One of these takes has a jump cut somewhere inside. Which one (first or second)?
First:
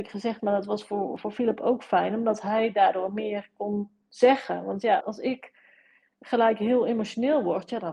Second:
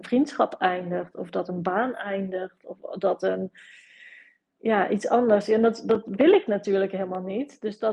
first